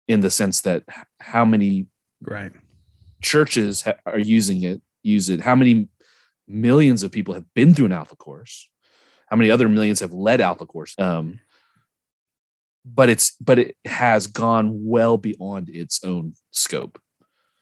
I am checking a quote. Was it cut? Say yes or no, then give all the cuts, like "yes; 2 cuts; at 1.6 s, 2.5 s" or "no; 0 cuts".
yes; 1 cut; at 10.9 s